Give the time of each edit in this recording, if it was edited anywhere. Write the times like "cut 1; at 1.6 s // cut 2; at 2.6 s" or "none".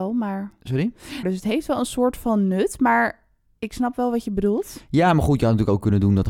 cut 1; at 1.2 s